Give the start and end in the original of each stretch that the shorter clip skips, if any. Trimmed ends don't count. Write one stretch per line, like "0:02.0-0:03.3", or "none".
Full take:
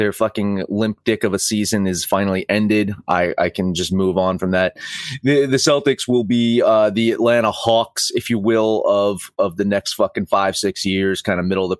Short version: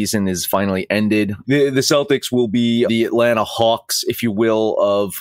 0:03.0-0:05.2
0:06.6-0:06.9